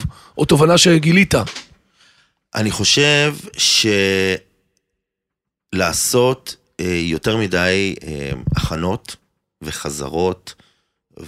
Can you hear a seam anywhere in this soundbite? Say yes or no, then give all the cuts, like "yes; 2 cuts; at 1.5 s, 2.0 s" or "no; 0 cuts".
yes; 1 cut; at 8.0 s